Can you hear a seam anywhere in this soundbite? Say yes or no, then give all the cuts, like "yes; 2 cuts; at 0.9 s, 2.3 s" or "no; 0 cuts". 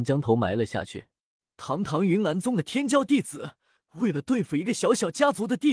yes; 2 cuts; at 1.4 s, 3.8 s